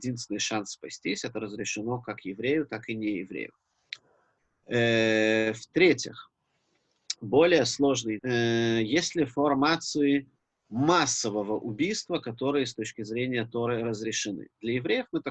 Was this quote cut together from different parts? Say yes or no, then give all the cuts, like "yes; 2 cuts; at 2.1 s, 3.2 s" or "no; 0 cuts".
yes; 1 cut; at 8.2 s